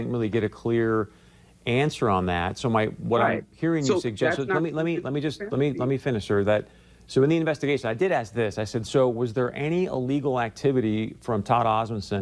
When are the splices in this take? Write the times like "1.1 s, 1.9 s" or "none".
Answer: none